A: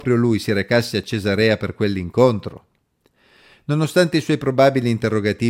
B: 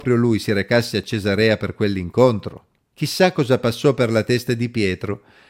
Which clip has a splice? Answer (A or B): B